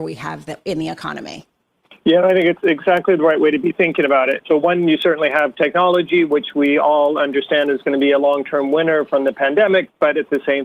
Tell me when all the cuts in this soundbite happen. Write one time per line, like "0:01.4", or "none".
0:04.4